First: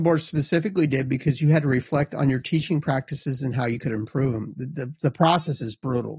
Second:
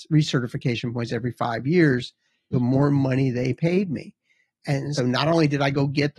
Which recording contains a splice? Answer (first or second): second